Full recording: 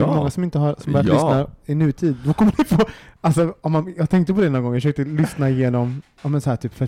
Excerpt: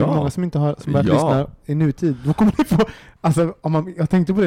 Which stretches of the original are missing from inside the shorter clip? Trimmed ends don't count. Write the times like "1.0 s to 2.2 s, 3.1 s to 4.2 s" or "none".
none